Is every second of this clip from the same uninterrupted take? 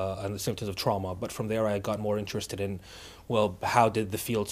yes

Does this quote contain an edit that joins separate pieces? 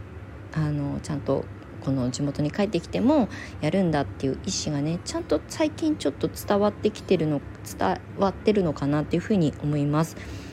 no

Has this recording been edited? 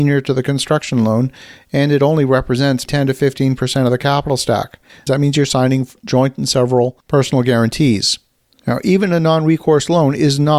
yes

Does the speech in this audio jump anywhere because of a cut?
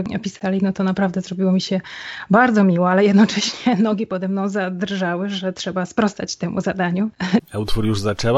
yes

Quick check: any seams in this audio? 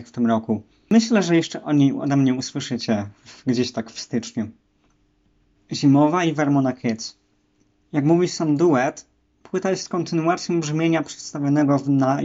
yes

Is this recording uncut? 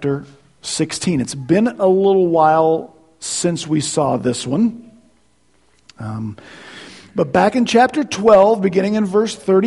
yes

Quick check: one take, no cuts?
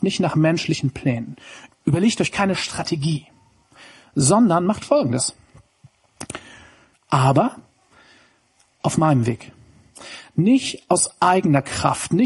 no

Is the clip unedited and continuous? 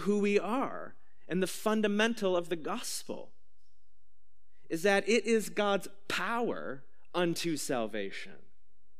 yes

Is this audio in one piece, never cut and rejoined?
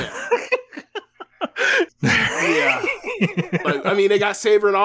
no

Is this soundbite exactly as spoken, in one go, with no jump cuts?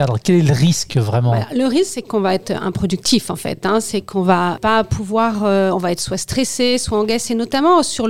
yes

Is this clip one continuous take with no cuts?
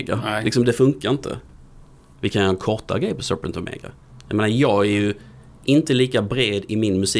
yes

